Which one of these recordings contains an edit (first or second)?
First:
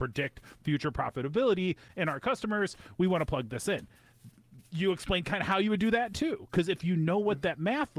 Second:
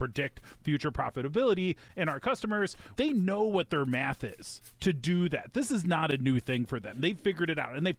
second